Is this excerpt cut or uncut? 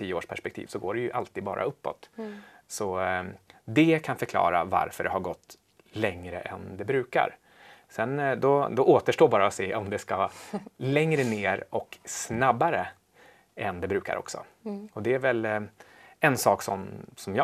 uncut